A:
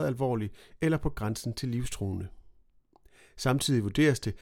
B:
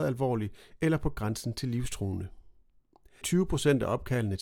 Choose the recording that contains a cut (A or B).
B